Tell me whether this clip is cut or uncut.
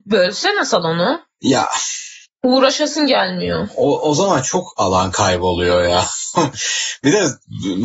uncut